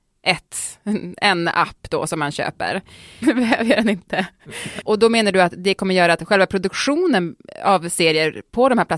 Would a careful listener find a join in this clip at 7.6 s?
no; 2 cuts; at 3.2 s, 4.8 s

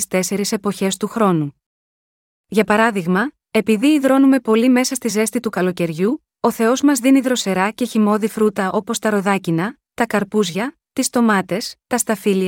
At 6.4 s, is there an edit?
no; 0 cuts

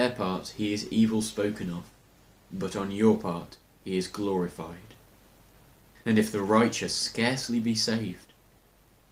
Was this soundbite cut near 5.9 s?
yes; 1 cut; at 5.9 s

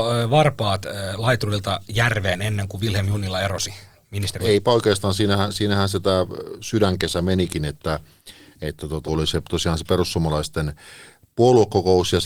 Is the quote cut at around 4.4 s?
yes; 2 cuts; at 4.4 s, 9.1 s

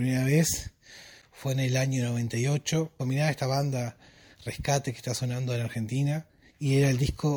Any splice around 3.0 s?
yes; 1 cut; at 3.0 s

